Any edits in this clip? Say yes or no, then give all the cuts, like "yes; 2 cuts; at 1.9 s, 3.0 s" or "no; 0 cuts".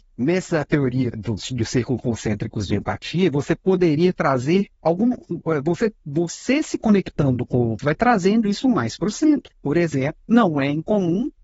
yes; 2 cuts; at 1.1 s, 7.8 s